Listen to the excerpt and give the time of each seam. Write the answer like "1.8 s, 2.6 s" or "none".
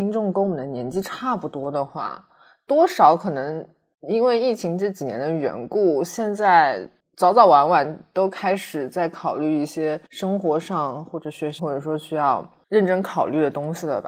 10.1 s, 11.6 s